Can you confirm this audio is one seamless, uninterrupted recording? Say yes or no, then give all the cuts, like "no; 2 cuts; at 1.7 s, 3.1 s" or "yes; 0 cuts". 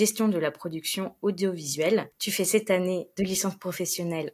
yes; 0 cuts